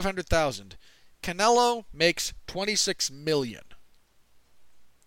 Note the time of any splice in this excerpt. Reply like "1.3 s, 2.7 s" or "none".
none